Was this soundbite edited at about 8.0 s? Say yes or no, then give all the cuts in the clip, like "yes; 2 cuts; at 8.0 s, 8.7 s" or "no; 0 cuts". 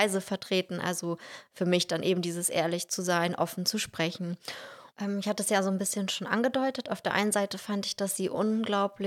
no; 1 cut; at 4.9 s